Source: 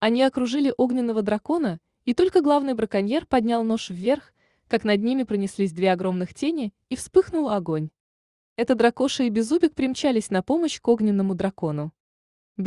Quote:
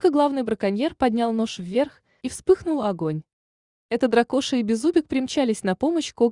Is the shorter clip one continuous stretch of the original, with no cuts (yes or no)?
no